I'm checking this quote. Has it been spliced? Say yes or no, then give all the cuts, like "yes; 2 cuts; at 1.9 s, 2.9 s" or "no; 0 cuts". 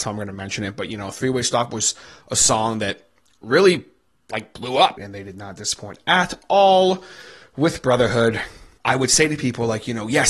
yes; 2 cuts; at 5.0 s, 8.8 s